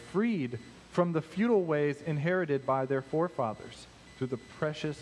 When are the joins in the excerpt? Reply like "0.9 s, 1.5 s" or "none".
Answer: none